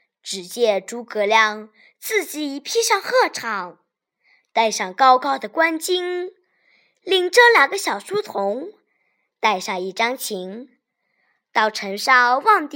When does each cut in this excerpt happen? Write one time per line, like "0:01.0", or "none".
none